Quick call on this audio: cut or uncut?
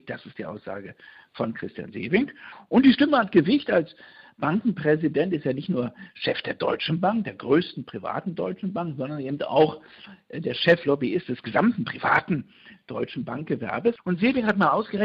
cut